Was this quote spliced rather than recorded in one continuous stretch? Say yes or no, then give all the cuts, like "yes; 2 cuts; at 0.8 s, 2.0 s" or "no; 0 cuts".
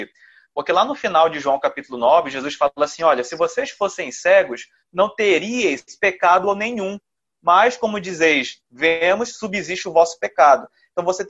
no; 0 cuts